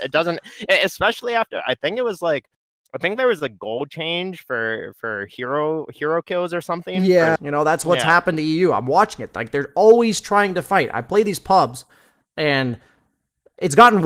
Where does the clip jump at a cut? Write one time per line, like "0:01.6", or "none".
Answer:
0:07.4

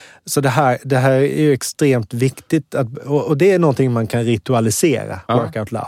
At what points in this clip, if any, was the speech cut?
none

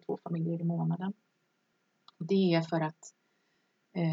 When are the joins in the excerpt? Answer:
none

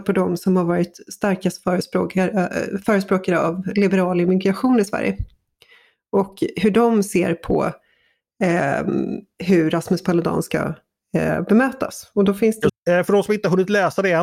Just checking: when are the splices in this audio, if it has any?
0:12.7

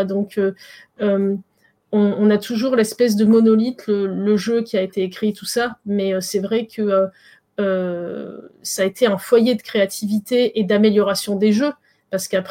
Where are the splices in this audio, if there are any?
none

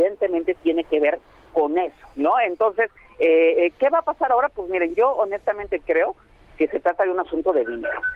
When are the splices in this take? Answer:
none

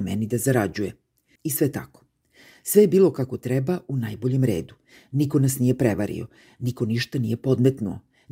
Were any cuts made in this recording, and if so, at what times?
0:01.4

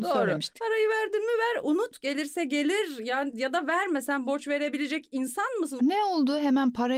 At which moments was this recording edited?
0:05.8

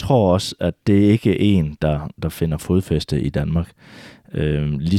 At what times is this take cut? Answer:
none

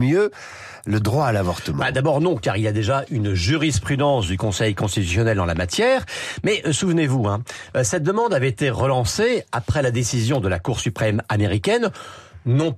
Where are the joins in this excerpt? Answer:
none

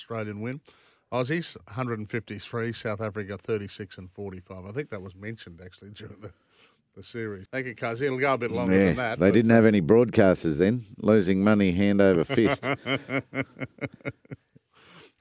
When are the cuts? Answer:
0:07.5

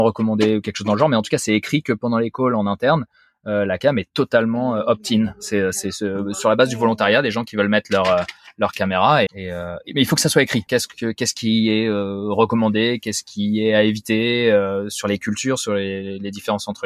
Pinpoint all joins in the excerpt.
0:09.3
0:10.7

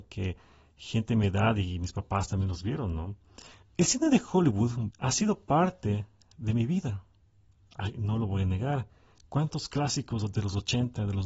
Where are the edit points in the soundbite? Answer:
0:03.6
0:04.9

